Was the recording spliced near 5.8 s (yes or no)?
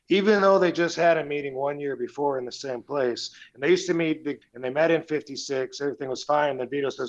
no